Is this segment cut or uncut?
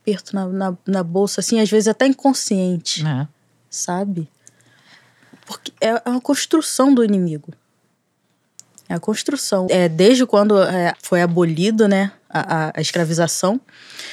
cut